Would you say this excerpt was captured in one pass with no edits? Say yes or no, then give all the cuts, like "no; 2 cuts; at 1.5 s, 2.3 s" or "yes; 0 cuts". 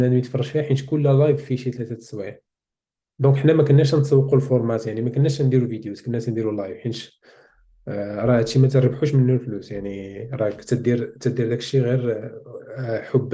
yes; 0 cuts